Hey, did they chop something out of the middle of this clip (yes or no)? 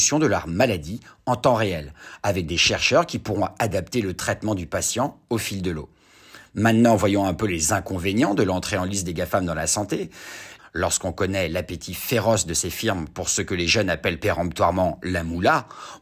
yes